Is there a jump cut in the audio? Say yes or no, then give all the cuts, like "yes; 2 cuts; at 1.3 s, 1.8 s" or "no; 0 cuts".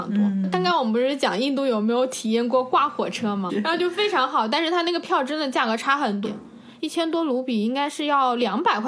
yes; 2 cuts; at 3.5 s, 6.2 s